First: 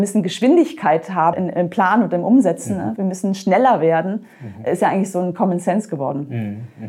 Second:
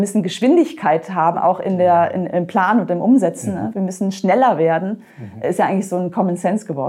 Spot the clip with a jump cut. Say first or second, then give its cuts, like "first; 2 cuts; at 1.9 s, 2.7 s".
first; 1 cut; at 1.3 s